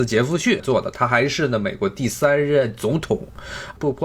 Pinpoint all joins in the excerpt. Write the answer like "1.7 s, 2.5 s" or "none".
none